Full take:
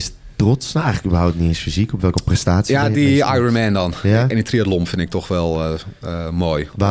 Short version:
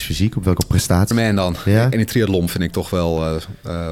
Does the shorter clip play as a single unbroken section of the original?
no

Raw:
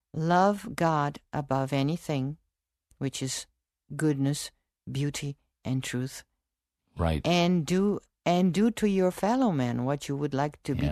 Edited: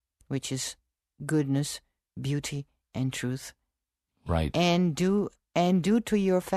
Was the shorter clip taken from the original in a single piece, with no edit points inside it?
yes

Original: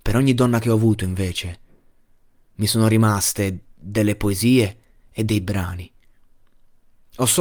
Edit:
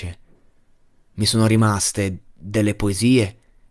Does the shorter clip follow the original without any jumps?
yes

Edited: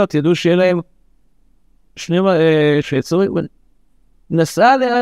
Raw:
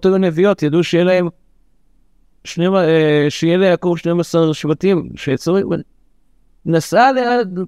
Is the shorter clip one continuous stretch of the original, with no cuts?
no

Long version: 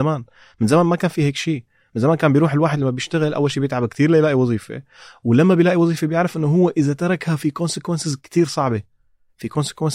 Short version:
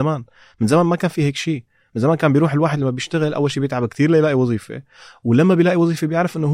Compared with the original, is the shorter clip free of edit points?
yes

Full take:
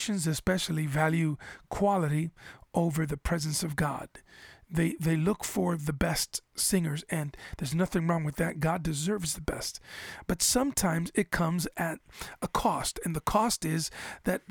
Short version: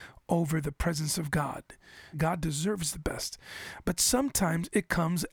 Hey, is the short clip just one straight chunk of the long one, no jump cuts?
no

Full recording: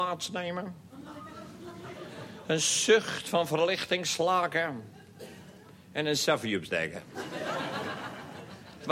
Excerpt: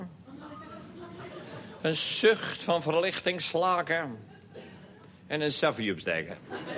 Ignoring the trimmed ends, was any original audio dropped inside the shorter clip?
no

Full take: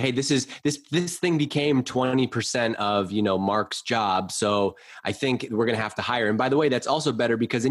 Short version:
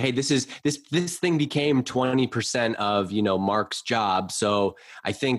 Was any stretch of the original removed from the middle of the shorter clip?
no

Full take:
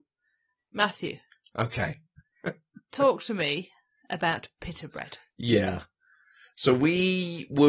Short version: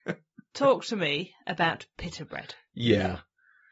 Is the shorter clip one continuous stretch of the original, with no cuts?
no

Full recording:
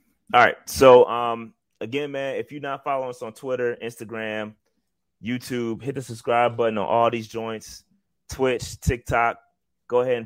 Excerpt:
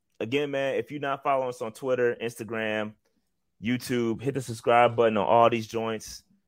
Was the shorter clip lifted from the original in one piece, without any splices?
yes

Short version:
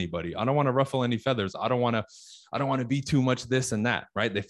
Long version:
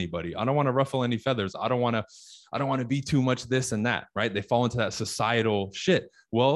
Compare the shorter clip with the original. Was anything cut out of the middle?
no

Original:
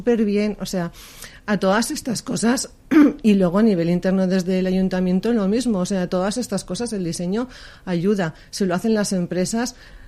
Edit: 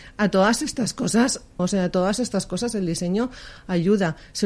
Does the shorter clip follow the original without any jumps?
no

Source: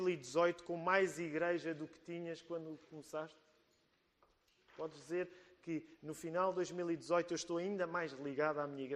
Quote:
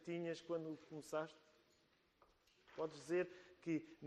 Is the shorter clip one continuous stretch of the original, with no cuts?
yes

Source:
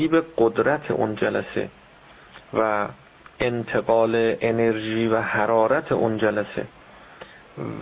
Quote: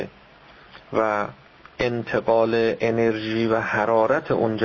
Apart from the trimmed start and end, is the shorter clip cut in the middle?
no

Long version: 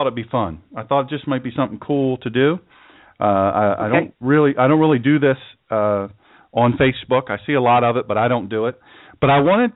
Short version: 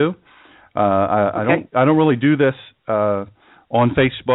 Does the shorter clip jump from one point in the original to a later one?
yes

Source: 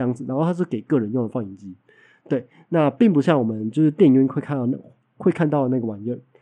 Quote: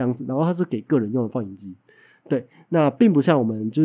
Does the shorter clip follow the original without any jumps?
yes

